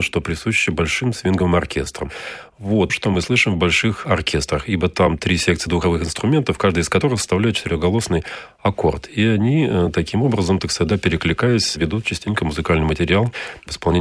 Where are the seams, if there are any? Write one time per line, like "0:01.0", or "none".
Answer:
0:02.9